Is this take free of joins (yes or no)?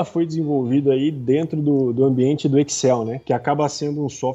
yes